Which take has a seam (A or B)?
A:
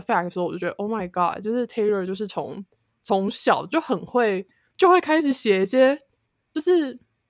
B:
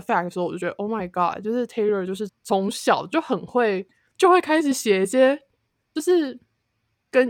B